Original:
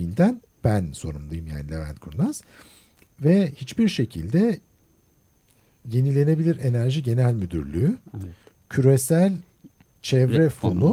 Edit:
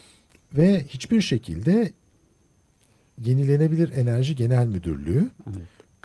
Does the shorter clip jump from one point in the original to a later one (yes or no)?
no